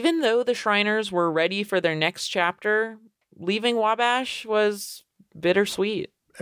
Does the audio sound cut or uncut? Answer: uncut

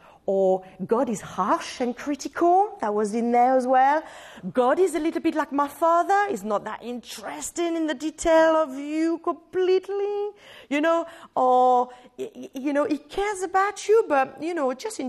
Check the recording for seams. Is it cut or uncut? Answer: uncut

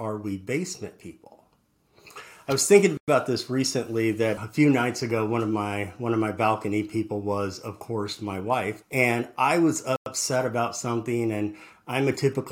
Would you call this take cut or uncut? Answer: cut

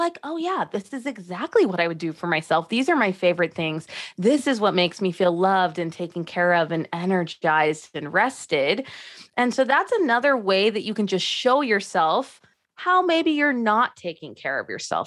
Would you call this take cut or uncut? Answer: uncut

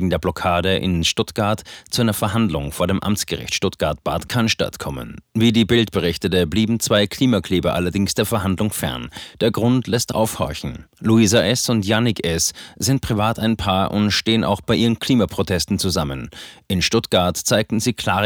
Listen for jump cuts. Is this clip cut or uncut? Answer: uncut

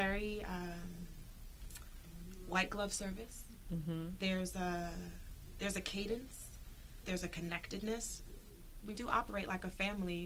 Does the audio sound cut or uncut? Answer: cut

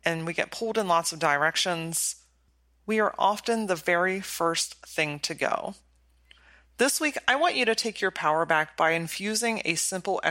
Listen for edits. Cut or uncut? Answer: uncut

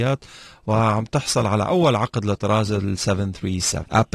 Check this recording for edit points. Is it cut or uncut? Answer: uncut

